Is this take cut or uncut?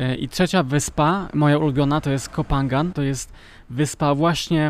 cut